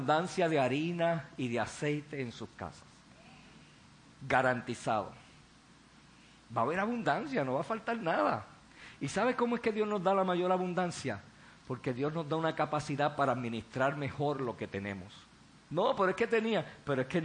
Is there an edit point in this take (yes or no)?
yes